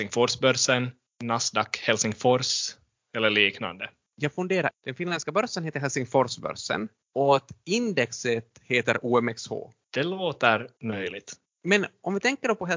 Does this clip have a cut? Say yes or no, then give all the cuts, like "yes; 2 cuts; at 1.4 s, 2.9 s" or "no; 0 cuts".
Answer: yes; 1 cut; at 4.7 s